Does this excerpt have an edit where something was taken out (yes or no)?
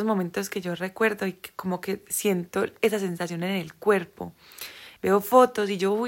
yes